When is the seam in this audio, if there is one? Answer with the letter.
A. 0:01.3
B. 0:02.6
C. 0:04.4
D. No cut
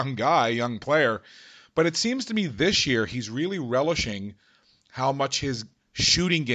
D